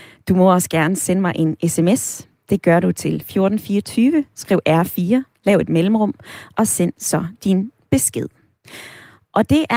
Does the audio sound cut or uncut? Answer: uncut